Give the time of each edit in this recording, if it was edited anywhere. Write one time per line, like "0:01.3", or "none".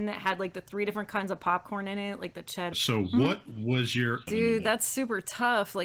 0:02.7
0:04.3